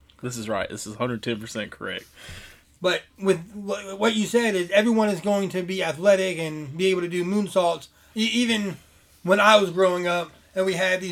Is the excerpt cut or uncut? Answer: cut